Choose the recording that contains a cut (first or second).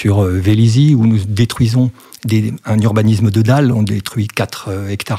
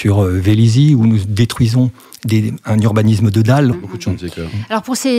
second